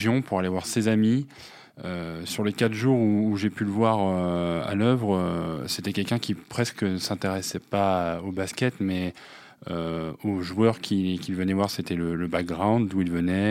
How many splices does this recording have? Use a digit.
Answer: 0